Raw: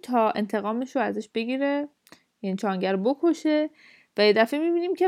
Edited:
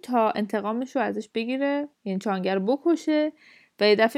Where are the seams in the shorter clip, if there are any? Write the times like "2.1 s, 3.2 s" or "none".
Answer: 1.9 s